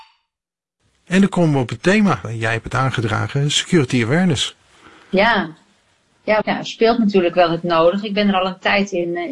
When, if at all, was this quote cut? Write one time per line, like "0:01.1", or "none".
0:06.4